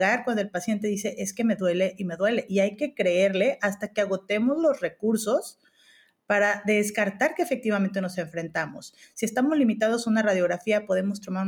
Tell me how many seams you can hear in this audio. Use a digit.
1